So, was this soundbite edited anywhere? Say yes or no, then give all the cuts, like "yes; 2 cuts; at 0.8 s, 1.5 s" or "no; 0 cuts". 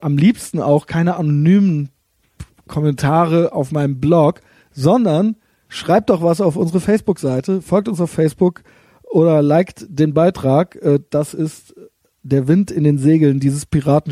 no; 0 cuts